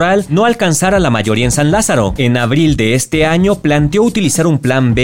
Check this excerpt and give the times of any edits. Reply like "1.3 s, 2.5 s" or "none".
2.2 s